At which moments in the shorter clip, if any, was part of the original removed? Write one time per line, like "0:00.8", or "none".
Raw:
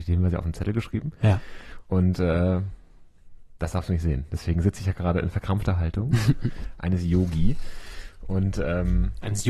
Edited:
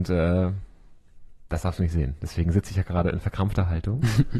none